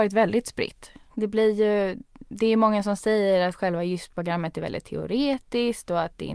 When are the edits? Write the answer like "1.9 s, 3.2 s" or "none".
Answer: 1.1 s